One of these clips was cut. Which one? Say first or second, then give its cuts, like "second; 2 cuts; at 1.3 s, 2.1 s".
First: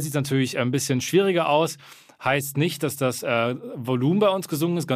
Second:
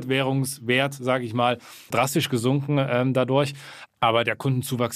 second; 2 cuts; at 1.9 s, 3.9 s